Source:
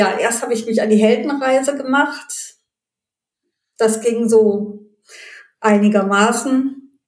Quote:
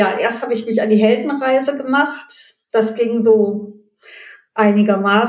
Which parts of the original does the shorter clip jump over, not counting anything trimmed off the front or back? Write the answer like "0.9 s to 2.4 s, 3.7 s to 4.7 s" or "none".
2.6 s to 3.7 s